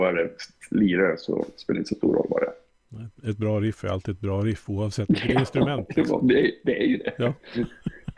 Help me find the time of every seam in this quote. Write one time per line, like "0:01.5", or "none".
none